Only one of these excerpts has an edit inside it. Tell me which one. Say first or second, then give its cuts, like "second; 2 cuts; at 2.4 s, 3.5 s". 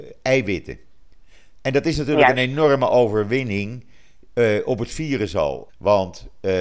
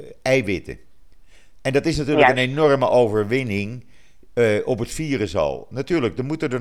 first; 1 cut; at 5.7 s